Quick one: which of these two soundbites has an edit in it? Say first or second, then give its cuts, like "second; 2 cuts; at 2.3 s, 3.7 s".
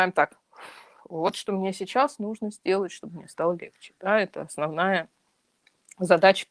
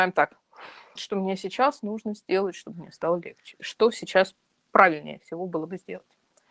second; 2 cuts; at 1.0 s, 3.6 s